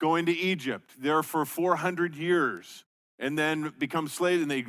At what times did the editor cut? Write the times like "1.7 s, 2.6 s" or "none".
none